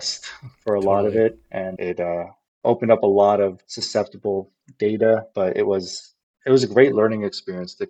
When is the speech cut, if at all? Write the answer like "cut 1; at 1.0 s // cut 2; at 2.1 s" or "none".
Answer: none